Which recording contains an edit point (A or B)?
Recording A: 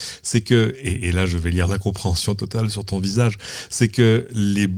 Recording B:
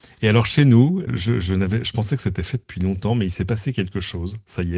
B